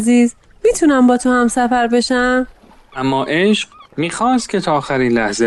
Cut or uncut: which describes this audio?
cut